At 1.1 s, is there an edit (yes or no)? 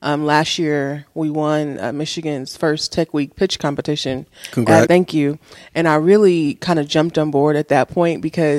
no